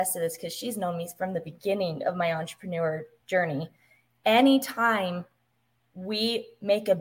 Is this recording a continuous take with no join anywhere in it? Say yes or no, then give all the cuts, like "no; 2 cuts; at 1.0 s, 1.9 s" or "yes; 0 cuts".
yes; 0 cuts